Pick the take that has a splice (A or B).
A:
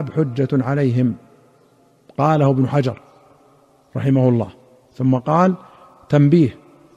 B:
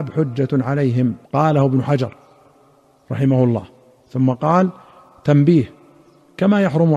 B